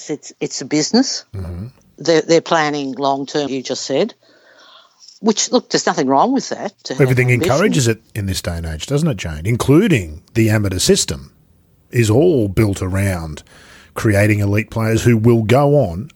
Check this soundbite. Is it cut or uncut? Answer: cut